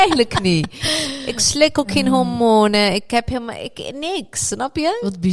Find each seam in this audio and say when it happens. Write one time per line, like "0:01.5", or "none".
none